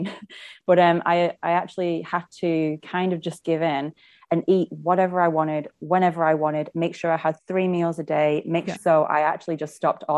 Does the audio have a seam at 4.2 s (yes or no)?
no